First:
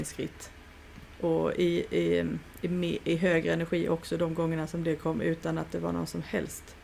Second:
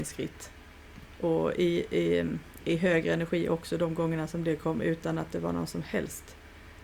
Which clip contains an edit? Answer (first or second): second